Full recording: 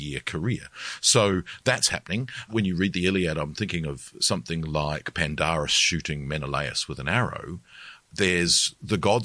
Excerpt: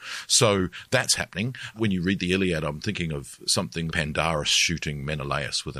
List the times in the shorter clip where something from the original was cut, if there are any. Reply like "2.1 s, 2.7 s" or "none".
3.9 s